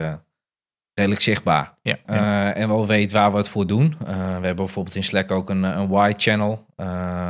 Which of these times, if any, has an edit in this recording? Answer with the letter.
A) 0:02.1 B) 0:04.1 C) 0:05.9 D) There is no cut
A